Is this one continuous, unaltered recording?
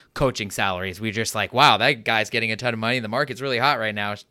yes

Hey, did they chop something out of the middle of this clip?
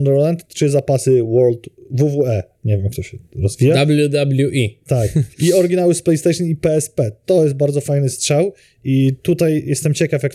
yes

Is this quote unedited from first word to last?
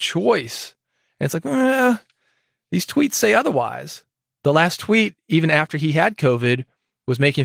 yes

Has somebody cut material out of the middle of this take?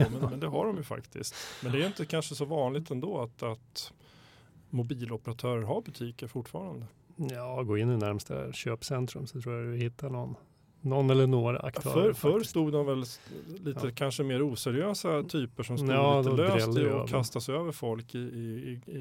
no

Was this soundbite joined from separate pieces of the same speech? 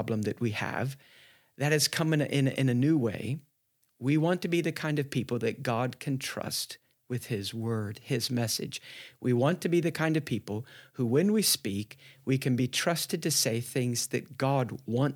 no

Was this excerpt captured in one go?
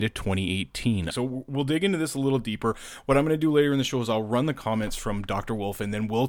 no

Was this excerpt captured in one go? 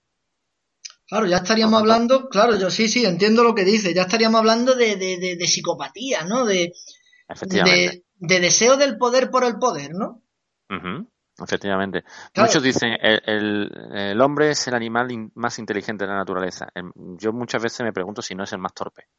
yes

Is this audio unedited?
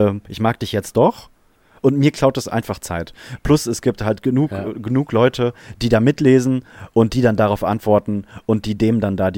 yes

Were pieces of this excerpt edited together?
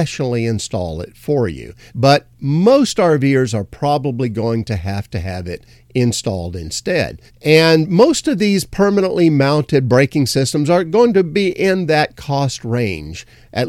yes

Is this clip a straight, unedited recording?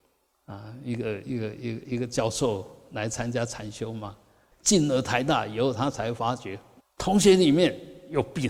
no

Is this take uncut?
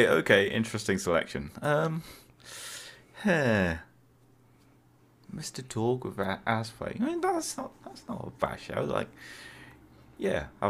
yes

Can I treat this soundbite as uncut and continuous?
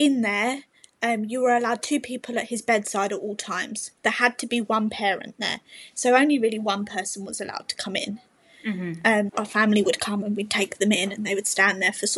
no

